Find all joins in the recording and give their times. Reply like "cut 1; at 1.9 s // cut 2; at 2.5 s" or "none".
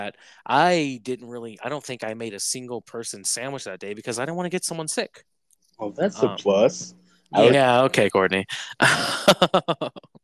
cut 1; at 7.5 s